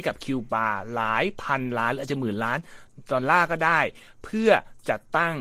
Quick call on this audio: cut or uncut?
uncut